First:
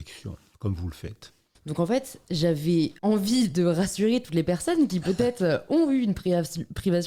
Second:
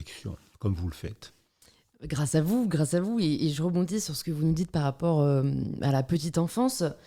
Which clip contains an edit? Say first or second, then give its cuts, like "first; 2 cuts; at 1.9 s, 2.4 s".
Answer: first; 2 cuts; at 1.5 s, 3.0 s